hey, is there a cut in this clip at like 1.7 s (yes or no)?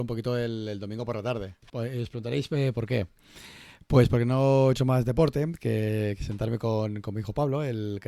yes